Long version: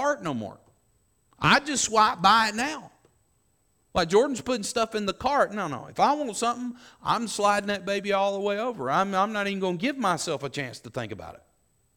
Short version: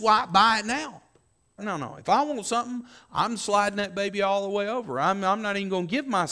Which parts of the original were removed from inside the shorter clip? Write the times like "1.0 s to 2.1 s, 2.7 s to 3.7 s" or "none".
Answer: 3.5 s to 5.5 s